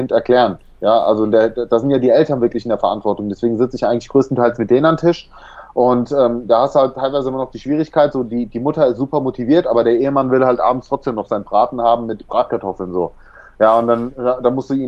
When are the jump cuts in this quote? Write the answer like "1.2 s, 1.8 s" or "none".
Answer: none